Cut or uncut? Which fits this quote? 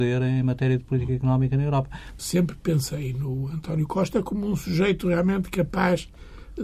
cut